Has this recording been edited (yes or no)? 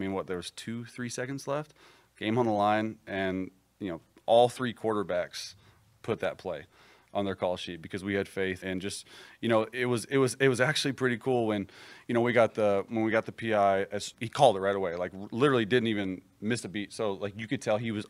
yes